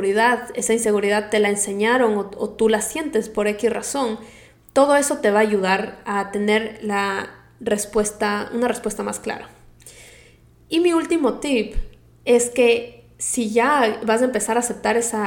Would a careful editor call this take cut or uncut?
uncut